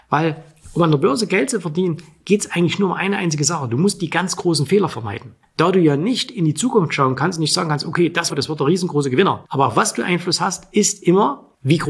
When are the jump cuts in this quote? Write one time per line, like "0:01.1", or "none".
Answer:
0:08.3
0:09.5